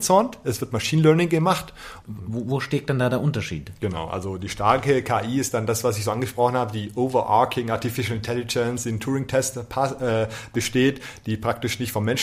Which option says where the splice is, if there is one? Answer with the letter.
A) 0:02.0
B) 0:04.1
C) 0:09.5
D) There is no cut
A